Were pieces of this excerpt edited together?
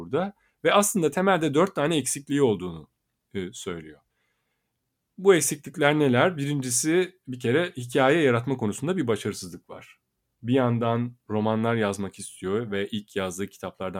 no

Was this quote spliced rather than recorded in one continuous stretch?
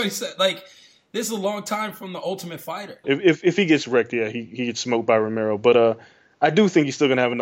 yes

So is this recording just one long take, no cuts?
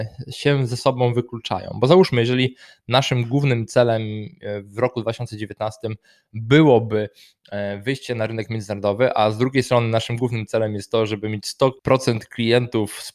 no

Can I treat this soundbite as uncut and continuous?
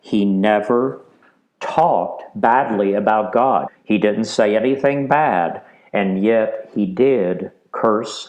no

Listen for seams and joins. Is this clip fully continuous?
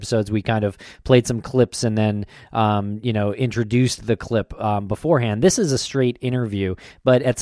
yes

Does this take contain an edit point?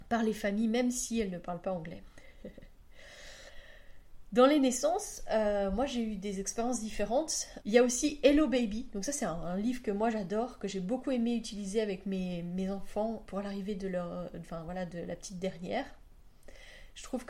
yes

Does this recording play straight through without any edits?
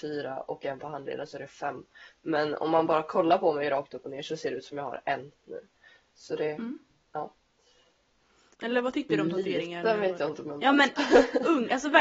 no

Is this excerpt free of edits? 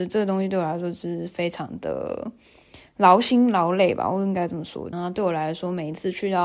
no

